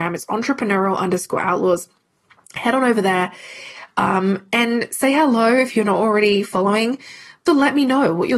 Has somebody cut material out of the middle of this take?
yes; 1 cut; at 7.5 s

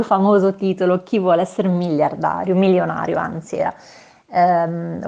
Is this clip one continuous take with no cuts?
yes; 0 cuts

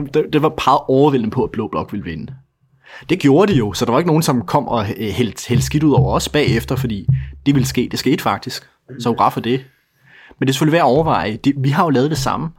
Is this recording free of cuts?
no; 1 cut; at 7.5 s

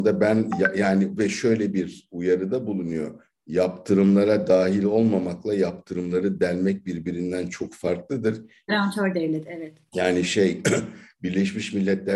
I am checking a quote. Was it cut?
yes; 1 cut; at 8.7 s

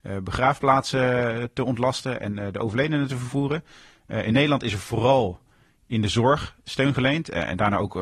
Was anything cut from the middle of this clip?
no; 0 cuts

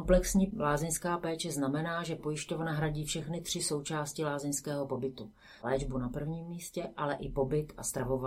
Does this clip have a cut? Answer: no; 0 cuts

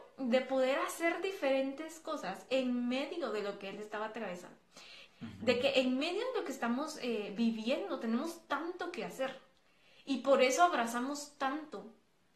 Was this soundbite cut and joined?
yes; 1 cut; at 5.1 s

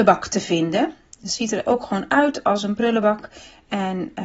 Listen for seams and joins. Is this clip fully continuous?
yes; 0 cuts

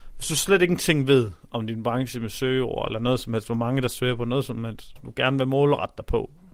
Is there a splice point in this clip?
yes; 1 cut; at 5.0 s

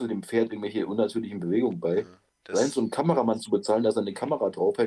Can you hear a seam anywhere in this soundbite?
yes; 1 cut; at 2.4 s

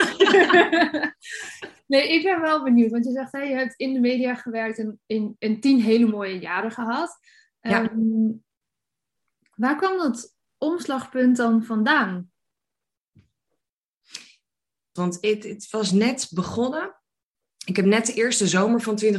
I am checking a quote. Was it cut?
yes; 1 cut; at 15.0 s

